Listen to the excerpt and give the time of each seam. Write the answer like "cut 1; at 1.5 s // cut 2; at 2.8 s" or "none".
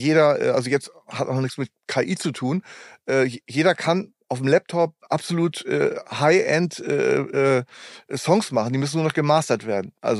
none